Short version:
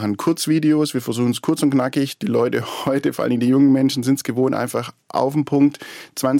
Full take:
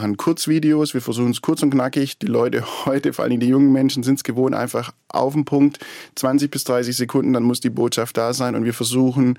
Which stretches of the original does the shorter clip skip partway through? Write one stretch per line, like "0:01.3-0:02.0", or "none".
none